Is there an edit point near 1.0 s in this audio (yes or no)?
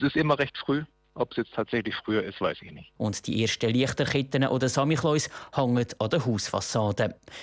no